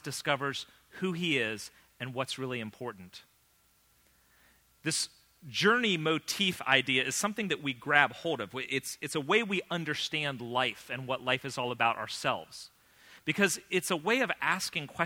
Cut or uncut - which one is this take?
uncut